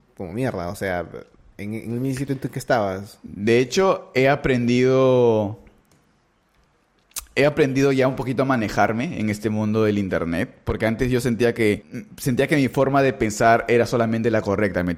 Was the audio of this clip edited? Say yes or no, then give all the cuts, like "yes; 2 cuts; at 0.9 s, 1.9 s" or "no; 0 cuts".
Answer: no; 0 cuts